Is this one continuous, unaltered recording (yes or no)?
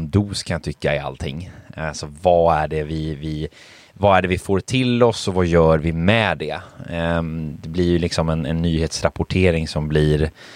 yes